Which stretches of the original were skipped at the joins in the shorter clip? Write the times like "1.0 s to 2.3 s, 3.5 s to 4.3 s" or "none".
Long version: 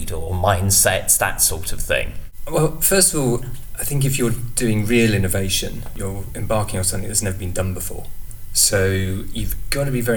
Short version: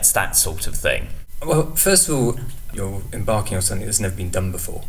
3.8 s to 5.9 s

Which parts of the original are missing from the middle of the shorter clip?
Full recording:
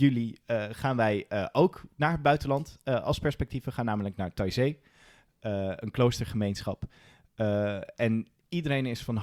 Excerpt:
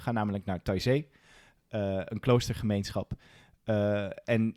none

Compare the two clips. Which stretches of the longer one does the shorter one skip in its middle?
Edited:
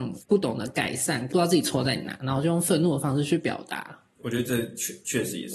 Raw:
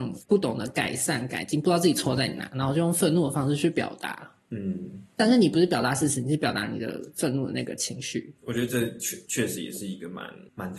1.3 s to 1.6 s, 4.5 s to 8.4 s

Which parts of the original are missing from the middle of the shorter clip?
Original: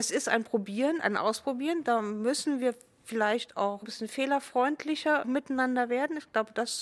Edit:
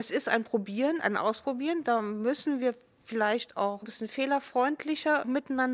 none

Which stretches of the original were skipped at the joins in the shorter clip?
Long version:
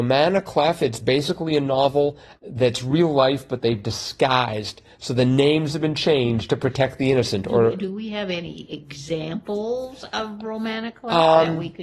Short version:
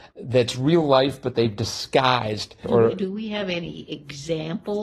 4.9 s to 7.4 s

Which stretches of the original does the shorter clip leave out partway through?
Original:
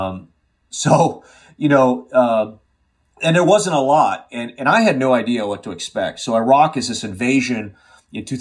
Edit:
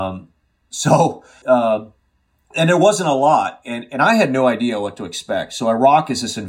1.4 s to 2.1 s

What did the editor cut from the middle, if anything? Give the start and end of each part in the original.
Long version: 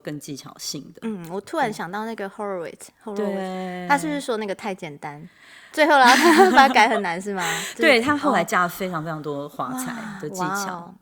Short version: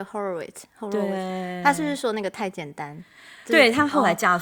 5.7 s to 7.7 s

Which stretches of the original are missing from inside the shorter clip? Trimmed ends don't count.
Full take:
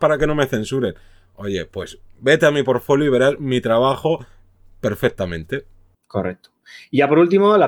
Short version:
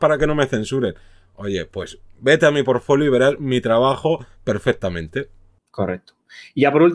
4.3 s to 4.7 s

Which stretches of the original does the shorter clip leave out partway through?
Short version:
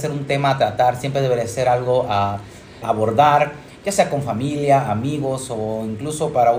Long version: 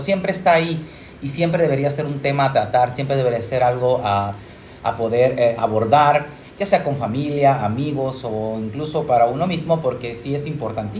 4.8 s to 5.6 s

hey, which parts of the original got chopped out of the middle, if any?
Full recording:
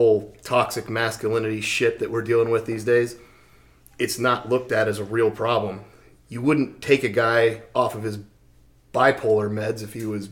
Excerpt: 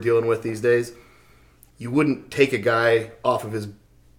3.9 s to 6.2 s

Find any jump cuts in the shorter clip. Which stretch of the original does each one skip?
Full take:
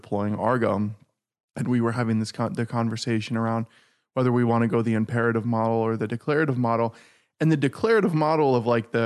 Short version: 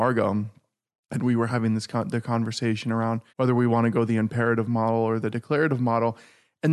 3.7 s to 4.1 s

